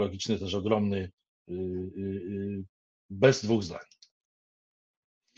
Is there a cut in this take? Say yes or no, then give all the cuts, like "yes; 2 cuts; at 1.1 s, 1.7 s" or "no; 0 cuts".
no; 0 cuts